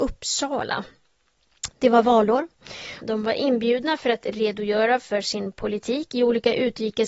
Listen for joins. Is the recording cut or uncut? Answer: cut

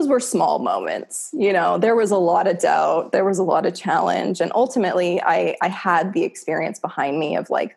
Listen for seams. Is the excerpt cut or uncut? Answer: uncut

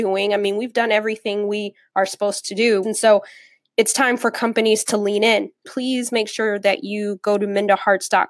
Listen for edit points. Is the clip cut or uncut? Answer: cut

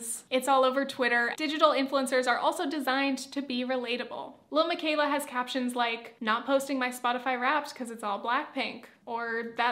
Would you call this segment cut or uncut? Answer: cut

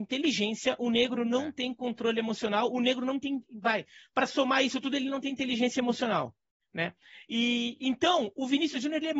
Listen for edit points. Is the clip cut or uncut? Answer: uncut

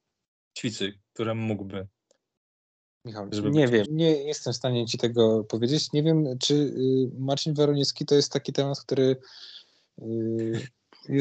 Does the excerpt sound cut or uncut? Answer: cut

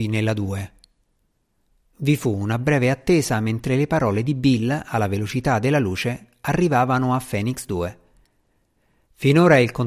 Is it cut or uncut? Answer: uncut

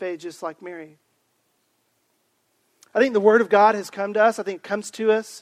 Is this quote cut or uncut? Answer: uncut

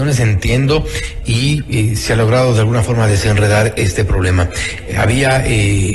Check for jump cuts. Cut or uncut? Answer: uncut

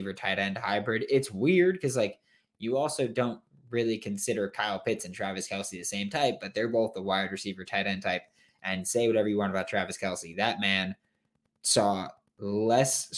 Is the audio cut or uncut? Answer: uncut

